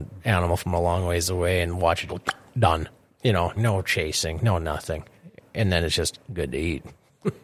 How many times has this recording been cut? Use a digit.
2